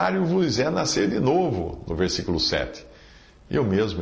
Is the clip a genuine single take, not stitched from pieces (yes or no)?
yes